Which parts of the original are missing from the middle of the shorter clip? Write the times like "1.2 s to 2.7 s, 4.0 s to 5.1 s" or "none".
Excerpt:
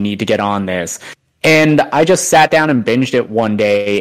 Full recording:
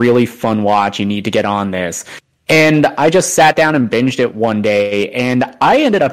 none